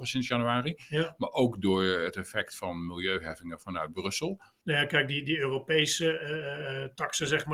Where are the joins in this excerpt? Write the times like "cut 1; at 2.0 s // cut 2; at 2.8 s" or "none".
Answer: cut 1; at 4.6 s